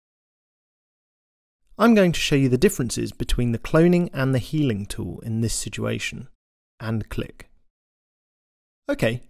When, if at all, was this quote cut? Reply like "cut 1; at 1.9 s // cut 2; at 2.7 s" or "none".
cut 1; at 6.6 s